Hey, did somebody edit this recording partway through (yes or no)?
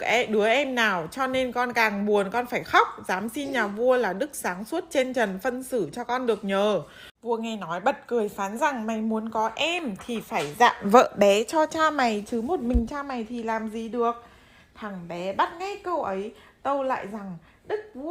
yes